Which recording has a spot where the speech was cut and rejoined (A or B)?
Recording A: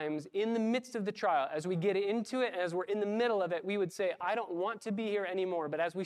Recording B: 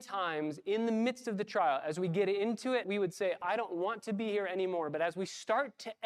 B